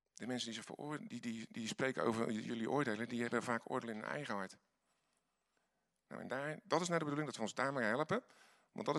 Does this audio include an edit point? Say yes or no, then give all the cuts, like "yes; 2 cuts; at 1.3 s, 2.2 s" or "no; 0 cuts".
no; 0 cuts